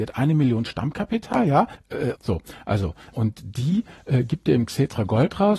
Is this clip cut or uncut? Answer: cut